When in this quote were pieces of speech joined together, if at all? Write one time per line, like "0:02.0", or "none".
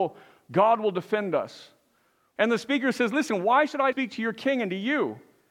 0:02.4
0:03.9